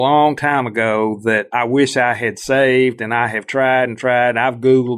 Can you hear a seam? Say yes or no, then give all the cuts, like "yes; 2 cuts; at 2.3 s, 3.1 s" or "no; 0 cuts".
no; 0 cuts